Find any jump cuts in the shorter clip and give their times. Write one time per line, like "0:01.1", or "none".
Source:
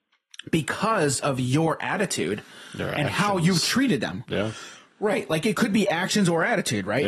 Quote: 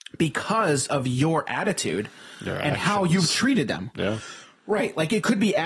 none